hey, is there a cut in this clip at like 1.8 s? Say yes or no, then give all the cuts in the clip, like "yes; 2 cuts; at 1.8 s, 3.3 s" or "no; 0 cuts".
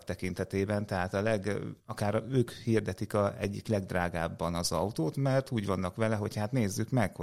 yes; 1 cut; at 1.8 s